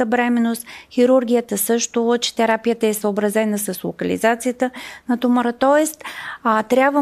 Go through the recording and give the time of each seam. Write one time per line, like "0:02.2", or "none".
none

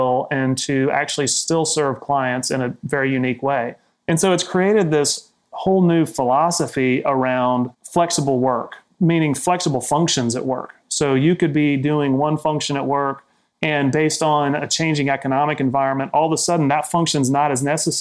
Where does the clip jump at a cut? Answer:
0:07.7

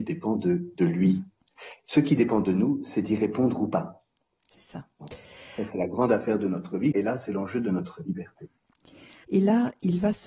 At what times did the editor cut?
0:05.7
0:06.9
0:09.2

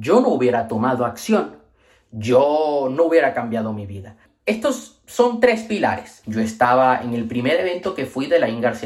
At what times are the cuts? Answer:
0:06.2

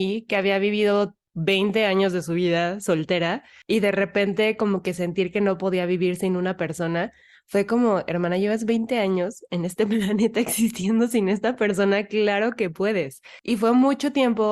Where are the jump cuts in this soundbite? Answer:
none

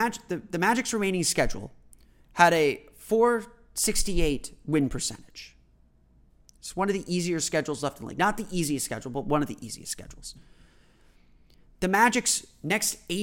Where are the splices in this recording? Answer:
none

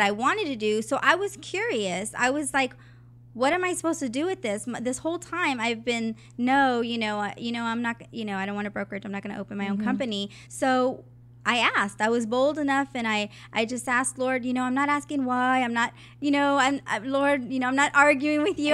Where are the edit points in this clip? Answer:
none

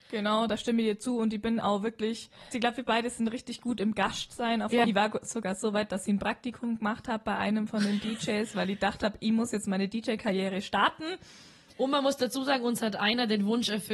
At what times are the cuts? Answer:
0:02.5
0:04.8

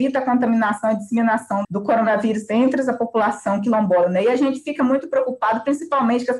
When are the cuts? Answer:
0:01.6

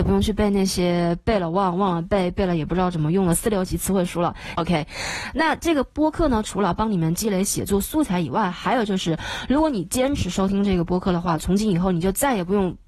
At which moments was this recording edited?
0:04.6

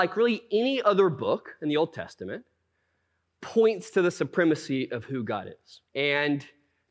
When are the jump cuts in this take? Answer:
0:05.9

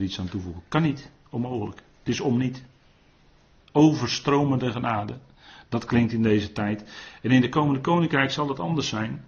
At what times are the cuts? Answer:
0:03.7

